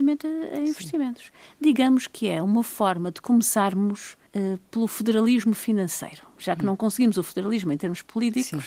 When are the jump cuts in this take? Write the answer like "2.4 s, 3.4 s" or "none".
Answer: 4.3 s